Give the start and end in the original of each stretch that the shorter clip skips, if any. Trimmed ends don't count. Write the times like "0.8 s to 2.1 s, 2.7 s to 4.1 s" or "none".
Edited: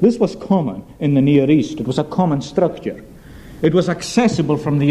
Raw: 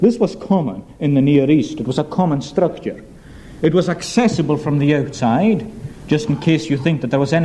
none